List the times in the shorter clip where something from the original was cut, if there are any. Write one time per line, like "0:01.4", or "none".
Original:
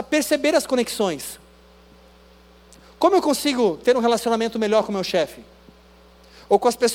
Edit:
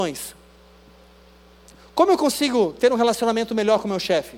none